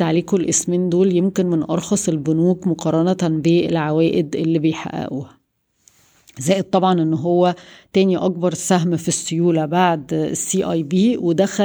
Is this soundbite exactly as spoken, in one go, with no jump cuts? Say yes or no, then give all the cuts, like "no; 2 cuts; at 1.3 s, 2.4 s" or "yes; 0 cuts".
yes; 0 cuts